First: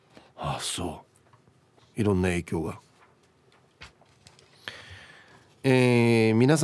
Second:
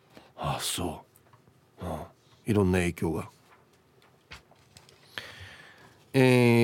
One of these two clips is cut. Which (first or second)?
first